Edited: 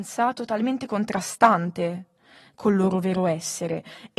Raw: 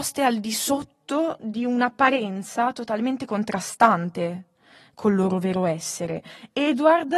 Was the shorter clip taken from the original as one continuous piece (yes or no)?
yes